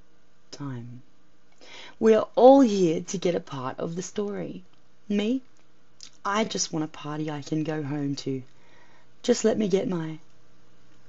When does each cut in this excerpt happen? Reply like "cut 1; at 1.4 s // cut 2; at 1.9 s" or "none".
none